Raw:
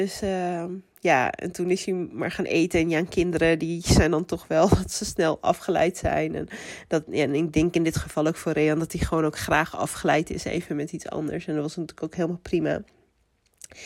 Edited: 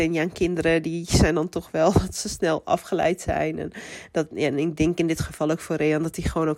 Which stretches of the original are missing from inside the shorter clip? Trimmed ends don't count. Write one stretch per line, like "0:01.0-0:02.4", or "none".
none